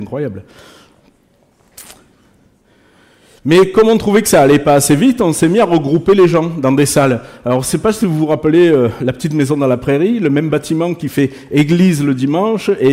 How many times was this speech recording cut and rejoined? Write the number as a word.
zero